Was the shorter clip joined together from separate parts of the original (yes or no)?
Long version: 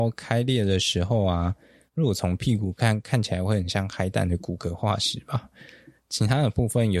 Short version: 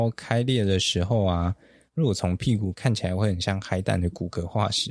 yes